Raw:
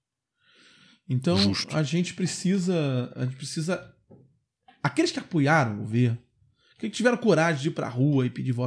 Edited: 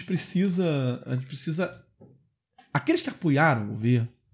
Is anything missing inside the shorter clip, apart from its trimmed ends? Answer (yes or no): no